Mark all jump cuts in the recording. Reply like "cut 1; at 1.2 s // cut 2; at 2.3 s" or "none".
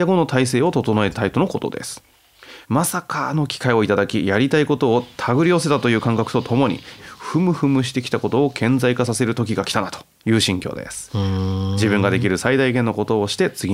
cut 1; at 2.6 s // cut 2; at 7.0 s